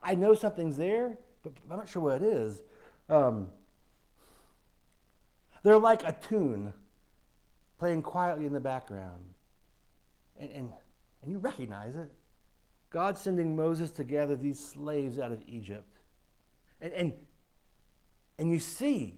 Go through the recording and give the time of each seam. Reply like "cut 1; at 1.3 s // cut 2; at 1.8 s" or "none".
cut 1; at 12.8 s // cut 2; at 16.7 s